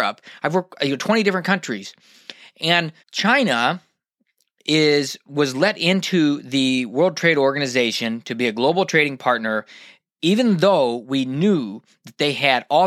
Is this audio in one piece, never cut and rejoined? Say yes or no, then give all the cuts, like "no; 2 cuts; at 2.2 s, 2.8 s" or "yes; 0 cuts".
no; 1 cut; at 3.0 s